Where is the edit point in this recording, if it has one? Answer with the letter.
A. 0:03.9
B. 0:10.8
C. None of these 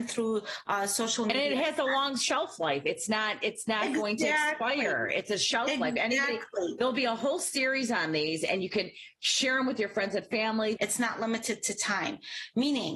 B